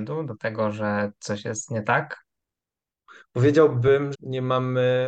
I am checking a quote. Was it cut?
yes; 1 cut; at 4.1 s

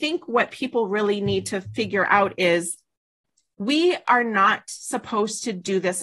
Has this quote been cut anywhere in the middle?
no; 0 cuts

